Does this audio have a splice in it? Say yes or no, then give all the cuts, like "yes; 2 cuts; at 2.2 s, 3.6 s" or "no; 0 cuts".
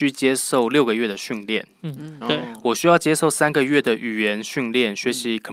yes; 1 cut; at 2.2 s